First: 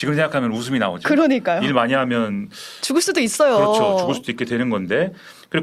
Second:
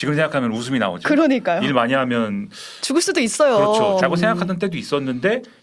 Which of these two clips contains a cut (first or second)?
second